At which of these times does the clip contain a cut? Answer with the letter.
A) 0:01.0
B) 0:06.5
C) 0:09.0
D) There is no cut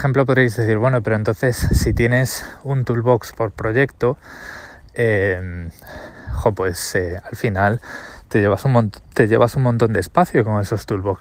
C